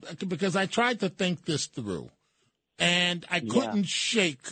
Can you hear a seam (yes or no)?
no